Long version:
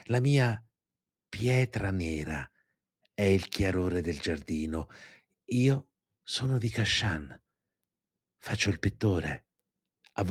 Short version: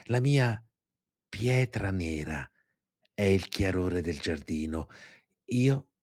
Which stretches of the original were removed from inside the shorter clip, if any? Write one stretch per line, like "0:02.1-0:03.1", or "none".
none